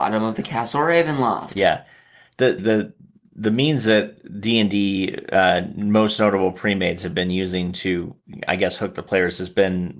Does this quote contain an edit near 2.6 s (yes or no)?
yes